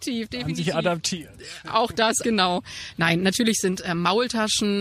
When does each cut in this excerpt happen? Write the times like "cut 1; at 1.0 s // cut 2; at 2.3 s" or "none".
cut 1; at 2.2 s